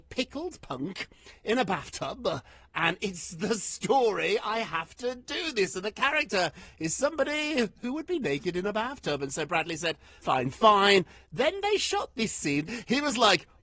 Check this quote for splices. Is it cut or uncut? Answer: cut